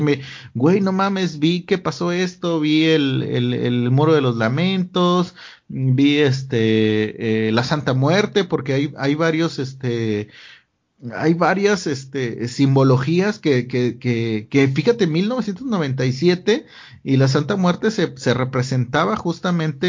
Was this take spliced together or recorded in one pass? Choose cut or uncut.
uncut